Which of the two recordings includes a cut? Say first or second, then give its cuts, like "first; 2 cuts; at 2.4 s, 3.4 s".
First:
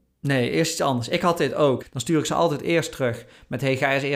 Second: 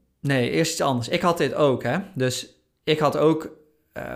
first; 1 cut; at 1.8 s